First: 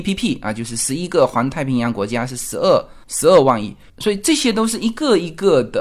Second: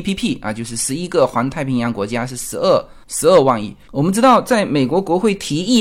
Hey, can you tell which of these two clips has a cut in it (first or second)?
second